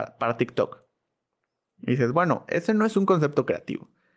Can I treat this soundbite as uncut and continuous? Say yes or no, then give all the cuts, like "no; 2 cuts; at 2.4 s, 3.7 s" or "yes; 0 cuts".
yes; 0 cuts